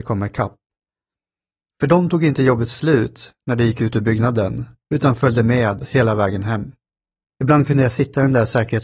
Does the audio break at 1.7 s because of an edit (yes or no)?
yes